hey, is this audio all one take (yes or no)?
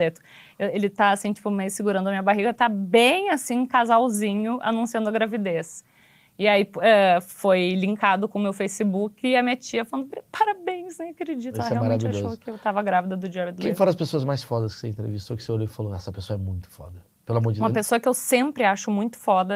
yes